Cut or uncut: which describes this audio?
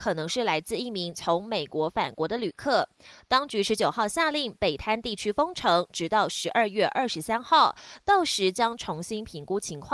uncut